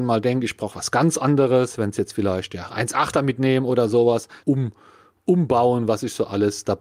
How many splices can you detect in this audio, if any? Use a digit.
2